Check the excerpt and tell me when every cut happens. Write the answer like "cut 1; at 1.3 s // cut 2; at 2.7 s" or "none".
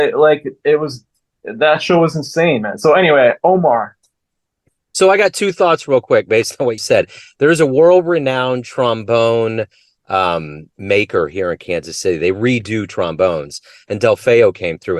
cut 1; at 6.8 s